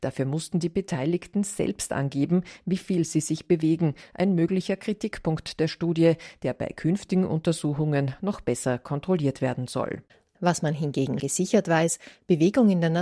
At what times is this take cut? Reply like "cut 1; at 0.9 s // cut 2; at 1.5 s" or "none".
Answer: cut 1; at 11.2 s